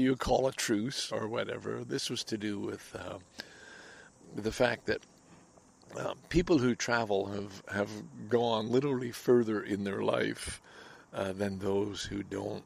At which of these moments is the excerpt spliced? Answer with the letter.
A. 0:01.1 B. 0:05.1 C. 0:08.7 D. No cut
A